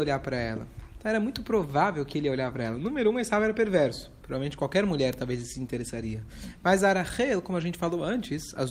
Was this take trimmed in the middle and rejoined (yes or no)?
no